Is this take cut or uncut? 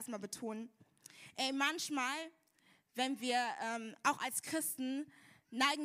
uncut